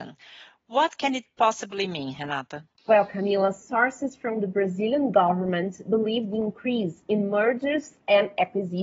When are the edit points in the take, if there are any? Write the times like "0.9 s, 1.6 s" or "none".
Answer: 2.7 s